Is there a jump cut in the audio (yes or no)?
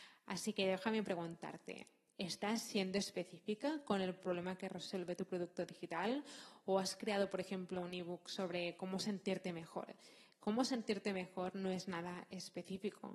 no